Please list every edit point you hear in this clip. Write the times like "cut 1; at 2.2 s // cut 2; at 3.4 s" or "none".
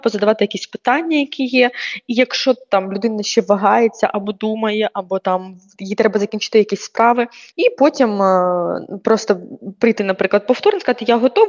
cut 1; at 7.5 s